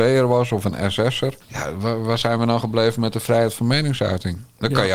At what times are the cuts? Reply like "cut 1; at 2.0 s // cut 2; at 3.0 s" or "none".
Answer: cut 1; at 1.4 s